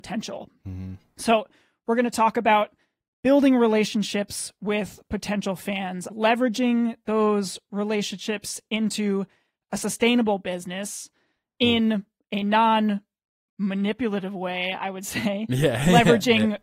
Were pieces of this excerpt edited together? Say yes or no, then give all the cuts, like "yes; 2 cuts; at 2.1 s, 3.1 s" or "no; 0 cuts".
yes; 1 cut; at 6.1 s